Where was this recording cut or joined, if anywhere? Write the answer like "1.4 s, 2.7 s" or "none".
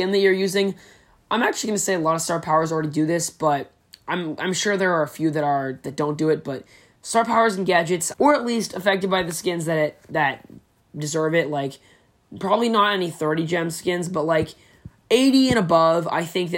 8.1 s